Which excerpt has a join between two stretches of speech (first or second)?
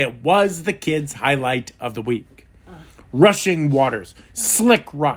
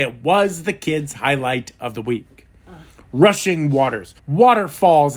second